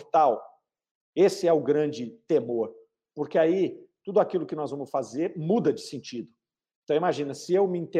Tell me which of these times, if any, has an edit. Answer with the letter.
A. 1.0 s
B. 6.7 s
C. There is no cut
C